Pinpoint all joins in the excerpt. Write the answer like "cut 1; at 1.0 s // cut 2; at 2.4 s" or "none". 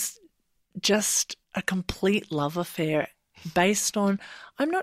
cut 1; at 1.4 s